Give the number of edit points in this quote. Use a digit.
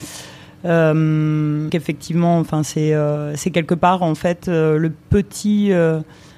1